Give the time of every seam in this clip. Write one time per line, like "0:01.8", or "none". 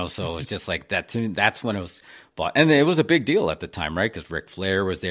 none